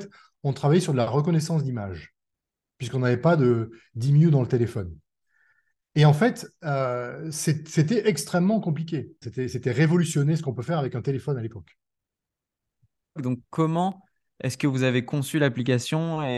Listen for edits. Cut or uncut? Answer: cut